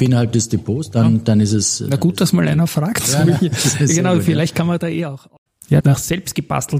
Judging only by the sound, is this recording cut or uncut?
cut